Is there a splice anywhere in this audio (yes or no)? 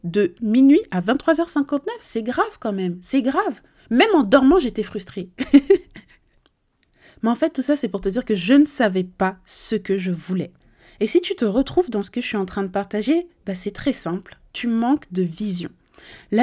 no